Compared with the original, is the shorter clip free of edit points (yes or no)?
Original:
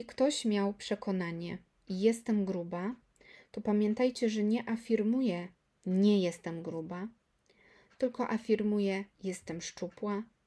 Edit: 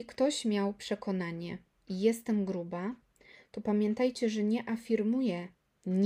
yes